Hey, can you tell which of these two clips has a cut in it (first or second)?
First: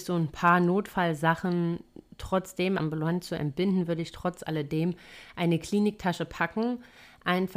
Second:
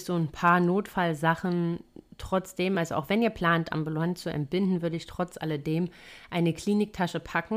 first